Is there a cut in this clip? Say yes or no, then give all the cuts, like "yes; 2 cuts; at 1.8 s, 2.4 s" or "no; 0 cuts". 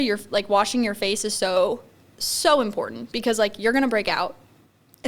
no; 0 cuts